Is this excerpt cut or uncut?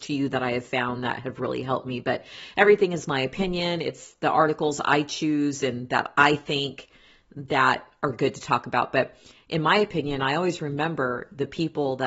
uncut